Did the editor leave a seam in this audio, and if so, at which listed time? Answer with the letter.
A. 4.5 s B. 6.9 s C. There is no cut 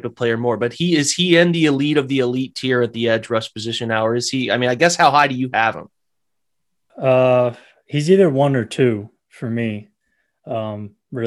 B